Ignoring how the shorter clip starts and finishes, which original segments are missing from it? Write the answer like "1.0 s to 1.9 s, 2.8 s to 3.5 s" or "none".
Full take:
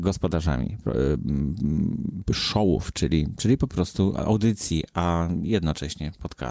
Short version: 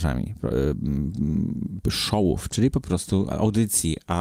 2.9 s to 3.4 s